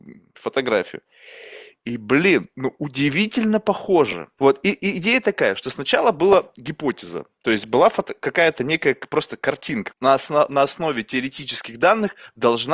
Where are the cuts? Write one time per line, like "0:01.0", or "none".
0:04.4
0:09.9